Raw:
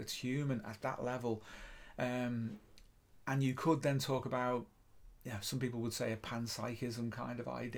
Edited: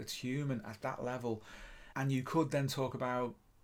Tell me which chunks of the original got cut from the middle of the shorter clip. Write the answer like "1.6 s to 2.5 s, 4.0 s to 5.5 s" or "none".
1.9 s to 3.2 s